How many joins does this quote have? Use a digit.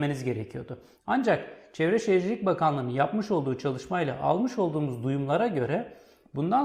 1